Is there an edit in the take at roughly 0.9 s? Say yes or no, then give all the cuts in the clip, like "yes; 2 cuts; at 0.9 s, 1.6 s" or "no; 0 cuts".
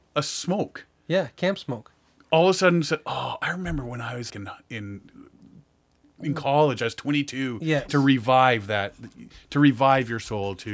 no; 2 cuts; at 4.3 s, 7.9 s